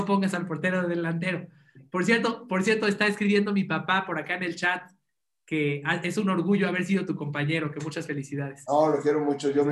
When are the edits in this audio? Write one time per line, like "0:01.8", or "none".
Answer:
none